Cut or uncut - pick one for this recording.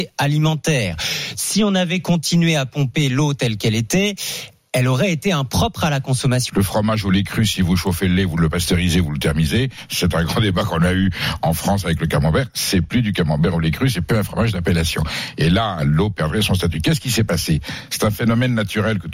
cut